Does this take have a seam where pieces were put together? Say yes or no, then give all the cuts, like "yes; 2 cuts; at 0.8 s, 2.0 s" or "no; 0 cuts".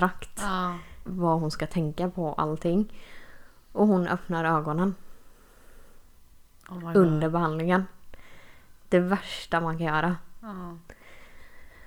yes; 1 cut; at 1.1 s